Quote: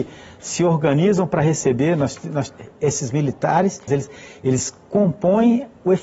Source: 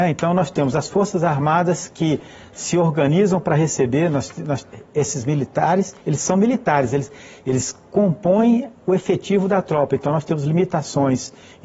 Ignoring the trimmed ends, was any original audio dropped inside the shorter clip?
yes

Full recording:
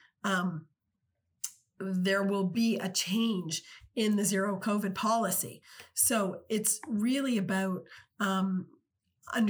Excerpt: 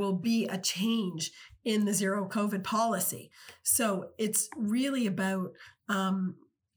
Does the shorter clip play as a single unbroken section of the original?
yes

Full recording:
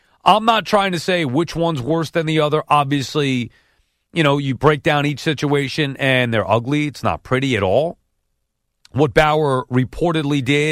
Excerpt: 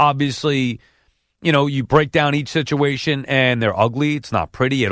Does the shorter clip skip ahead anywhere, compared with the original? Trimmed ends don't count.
no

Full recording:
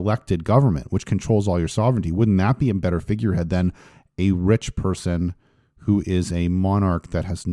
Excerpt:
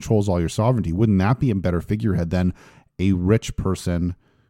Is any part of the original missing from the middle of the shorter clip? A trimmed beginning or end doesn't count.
no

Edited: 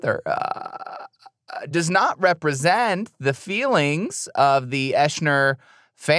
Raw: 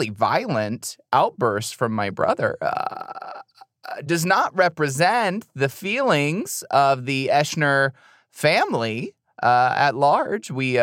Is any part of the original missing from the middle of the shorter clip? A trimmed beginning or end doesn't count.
no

